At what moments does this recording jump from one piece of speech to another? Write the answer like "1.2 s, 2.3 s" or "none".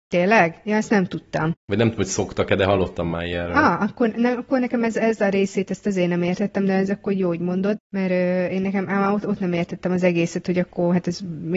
none

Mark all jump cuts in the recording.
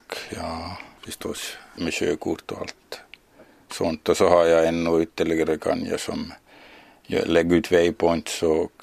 1.8 s

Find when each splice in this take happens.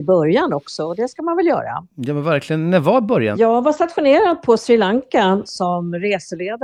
3.3 s, 5.5 s

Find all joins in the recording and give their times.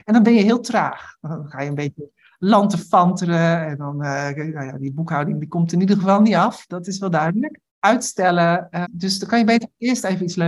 7.7 s, 8.8 s

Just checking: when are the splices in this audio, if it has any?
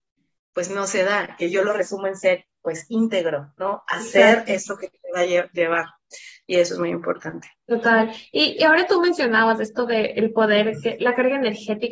none

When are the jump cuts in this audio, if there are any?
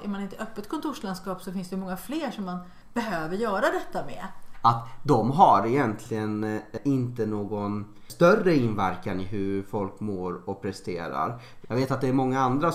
4.5 s, 11.6 s

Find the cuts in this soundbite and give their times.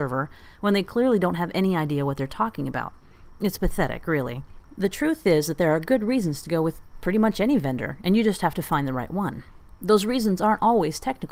none

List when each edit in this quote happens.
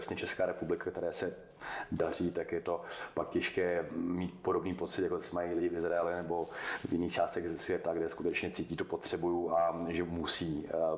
none

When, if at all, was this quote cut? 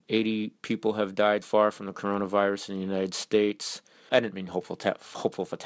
1.4 s, 4.1 s

